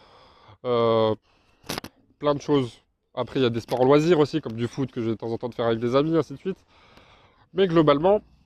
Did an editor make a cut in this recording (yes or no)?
no